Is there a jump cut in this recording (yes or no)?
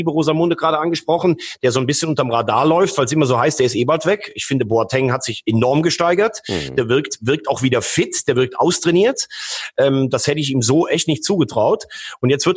no